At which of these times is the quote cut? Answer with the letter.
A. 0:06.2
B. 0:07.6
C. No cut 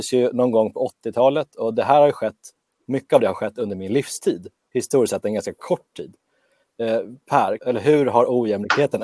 B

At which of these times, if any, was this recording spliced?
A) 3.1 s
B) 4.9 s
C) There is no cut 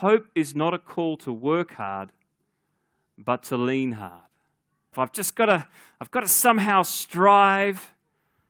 B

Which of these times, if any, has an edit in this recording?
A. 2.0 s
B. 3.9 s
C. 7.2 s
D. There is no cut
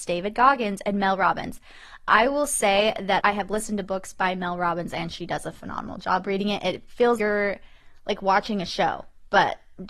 C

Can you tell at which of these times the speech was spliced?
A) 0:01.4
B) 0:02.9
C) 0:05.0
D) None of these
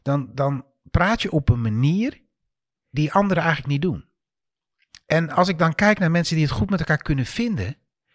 B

